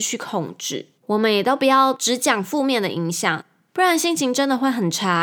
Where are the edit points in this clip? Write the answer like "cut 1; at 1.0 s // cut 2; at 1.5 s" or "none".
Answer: cut 1; at 1.0 s